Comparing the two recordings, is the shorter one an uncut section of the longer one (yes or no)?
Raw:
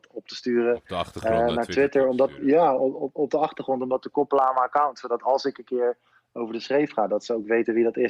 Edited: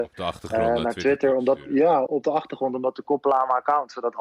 no